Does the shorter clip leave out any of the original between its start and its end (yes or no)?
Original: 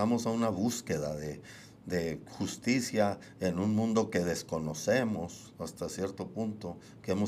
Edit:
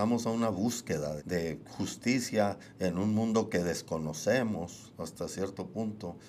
yes